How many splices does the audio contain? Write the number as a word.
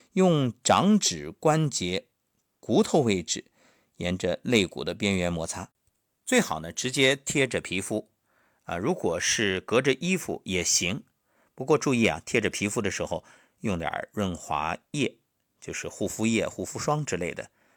zero